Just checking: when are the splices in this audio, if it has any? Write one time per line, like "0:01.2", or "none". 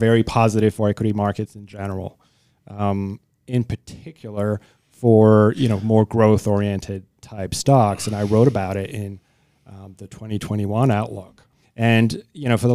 0:11.6

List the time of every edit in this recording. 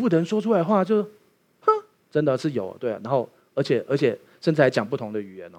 0:02.0

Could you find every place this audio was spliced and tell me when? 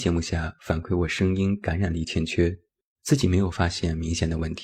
0:02.9

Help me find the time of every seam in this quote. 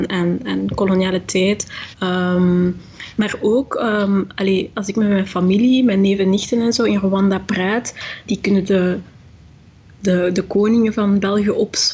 0:01.9
0:08.3

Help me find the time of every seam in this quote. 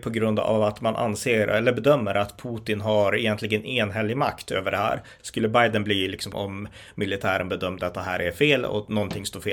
0:05.2
0:06.3

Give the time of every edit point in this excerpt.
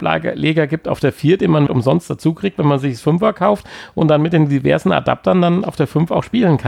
0:01.7

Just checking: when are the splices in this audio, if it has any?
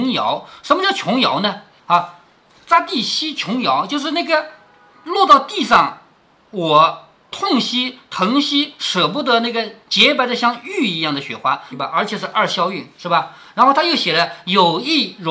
0:01.8
0:11.7

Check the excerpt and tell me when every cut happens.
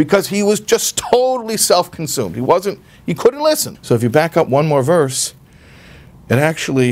0:03.7

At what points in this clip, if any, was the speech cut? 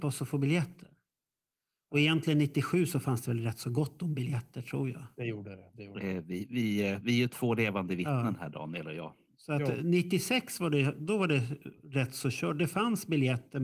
none

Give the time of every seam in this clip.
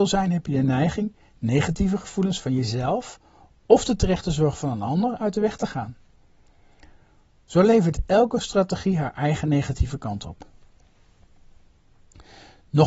none

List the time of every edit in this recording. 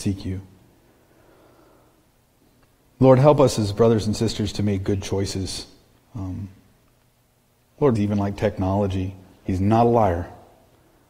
0:07.9
0:09.4

